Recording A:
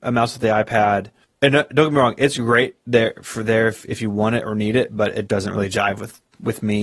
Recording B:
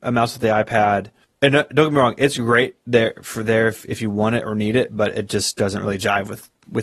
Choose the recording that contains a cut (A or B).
A